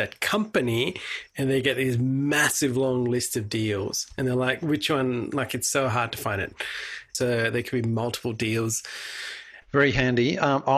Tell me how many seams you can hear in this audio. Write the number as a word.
two